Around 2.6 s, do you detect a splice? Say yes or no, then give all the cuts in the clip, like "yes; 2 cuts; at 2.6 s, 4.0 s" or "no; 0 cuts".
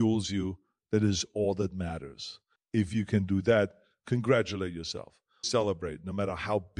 yes; 2 cuts; at 2.6 s, 5.4 s